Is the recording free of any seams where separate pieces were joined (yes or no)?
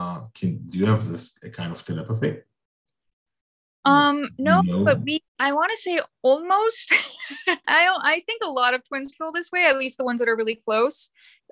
no